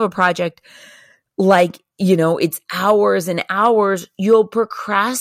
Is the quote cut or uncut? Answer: uncut